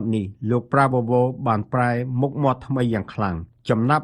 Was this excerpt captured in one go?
yes; 0 cuts

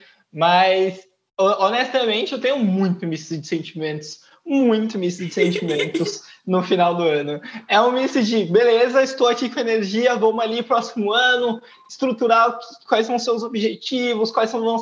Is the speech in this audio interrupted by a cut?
no; 0 cuts

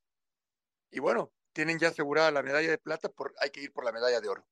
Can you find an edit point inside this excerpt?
yes; 2 cuts; at 1.5 s, 3.1 s

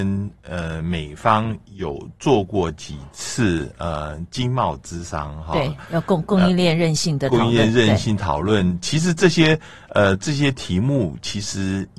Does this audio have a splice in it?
no; 0 cuts

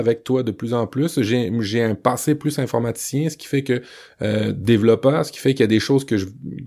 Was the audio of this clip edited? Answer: no; 0 cuts

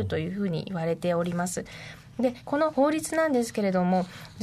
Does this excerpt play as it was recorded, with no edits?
yes; 0 cuts

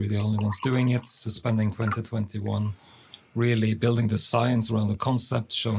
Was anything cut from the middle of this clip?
no; 0 cuts

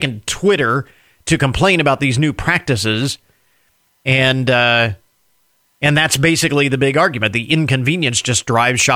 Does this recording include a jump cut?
no; 0 cuts

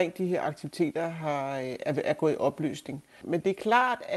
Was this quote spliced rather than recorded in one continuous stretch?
yes; 1 cut; at 3.2 s

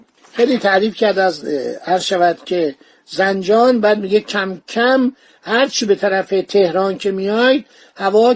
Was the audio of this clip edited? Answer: no; 0 cuts

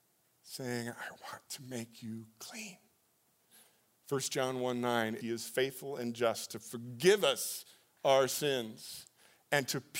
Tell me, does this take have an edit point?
yes; 1 cut; at 5.2 s

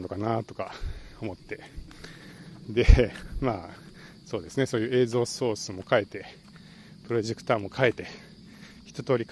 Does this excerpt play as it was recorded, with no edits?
yes; 0 cuts

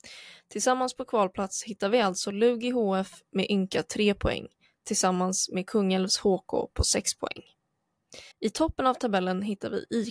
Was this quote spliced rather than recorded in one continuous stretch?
yes; 1 cut; at 8.3 s

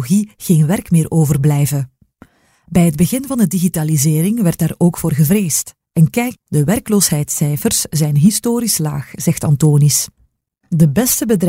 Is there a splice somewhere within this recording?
no; 0 cuts

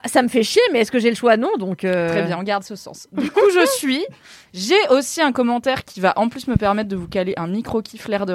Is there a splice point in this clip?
no; 0 cuts

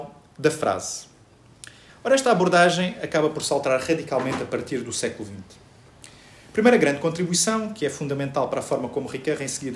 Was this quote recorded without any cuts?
no; 1 cut; at 1.9 s

